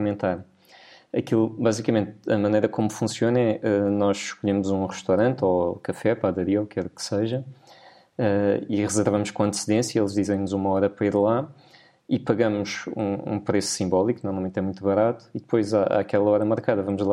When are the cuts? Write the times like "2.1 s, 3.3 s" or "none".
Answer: none